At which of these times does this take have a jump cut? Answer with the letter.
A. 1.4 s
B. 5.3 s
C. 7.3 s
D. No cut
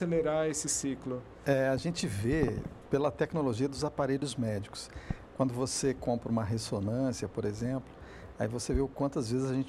D